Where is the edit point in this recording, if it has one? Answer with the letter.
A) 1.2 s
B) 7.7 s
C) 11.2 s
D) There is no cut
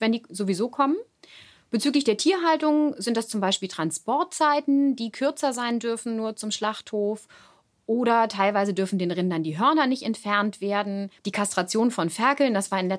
C